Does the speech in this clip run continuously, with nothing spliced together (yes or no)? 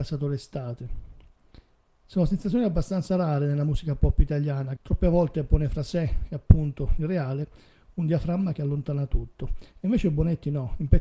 no